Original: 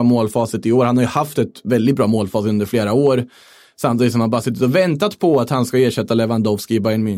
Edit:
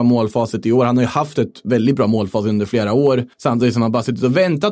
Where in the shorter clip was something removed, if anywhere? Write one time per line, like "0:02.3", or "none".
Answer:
0:03.3